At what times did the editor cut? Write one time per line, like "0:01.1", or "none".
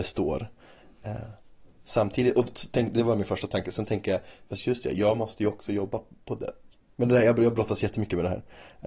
0:06.8